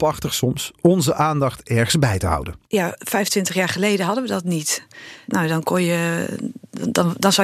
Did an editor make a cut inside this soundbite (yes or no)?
yes